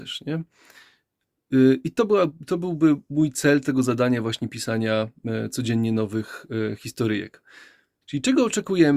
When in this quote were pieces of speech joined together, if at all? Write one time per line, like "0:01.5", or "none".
0:08.0